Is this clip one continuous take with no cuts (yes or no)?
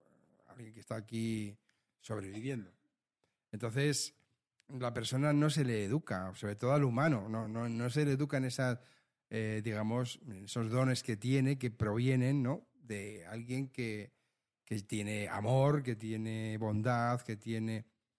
yes